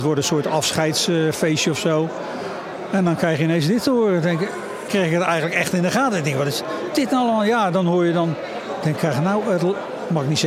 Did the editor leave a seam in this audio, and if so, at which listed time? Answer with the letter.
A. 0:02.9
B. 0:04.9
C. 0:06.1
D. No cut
B